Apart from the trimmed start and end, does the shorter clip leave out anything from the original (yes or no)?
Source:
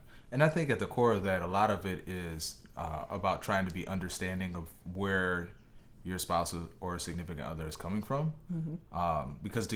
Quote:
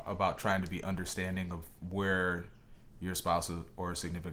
no